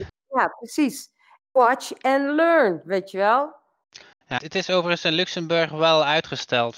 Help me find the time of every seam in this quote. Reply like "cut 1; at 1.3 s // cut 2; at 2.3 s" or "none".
cut 1; at 1.4 s // cut 2; at 4.4 s